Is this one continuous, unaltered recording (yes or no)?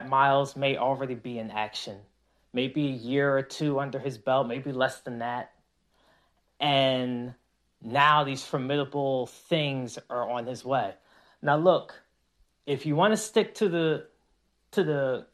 yes